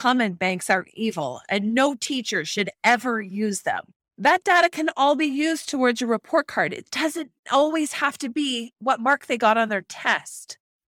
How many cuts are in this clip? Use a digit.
1